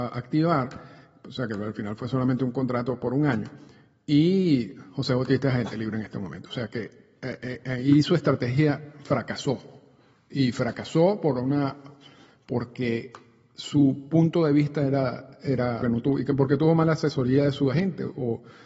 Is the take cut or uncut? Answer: cut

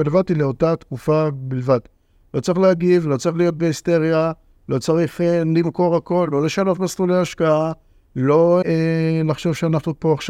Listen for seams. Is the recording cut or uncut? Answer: cut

